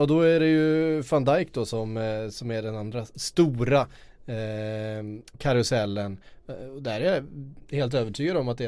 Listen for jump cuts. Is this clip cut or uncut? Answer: cut